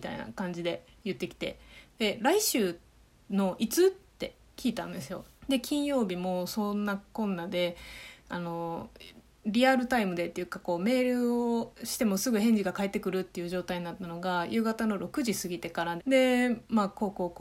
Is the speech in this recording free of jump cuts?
no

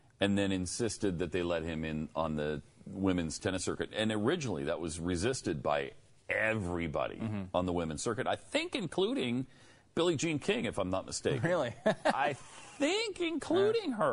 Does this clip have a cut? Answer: no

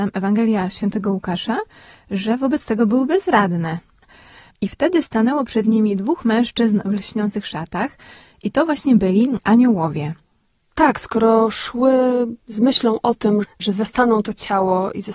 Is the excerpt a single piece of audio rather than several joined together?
no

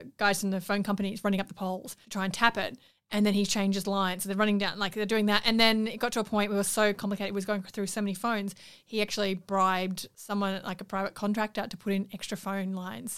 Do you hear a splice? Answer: no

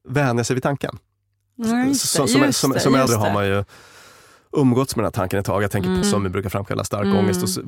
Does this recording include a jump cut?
yes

